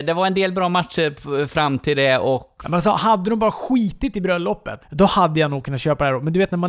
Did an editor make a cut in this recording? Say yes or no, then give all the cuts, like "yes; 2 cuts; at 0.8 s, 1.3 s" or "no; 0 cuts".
yes; 2 cuts; at 2.6 s, 4.8 s